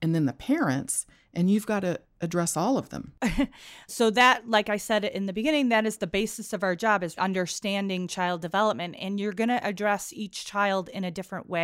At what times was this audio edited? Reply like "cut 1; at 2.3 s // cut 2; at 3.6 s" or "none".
cut 1; at 3.9 s // cut 2; at 7.2 s